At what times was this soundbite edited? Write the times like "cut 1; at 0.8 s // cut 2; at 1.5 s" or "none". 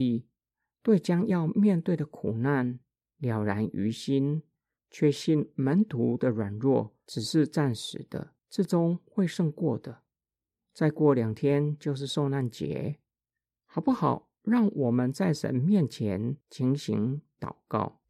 cut 1; at 8.4 s // cut 2; at 16.4 s